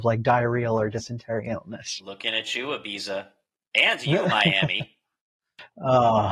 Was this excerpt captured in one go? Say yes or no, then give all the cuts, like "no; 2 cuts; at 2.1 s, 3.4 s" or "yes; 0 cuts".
yes; 0 cuts